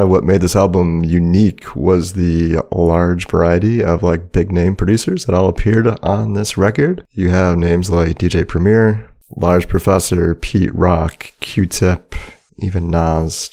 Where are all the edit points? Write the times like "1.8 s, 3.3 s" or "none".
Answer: none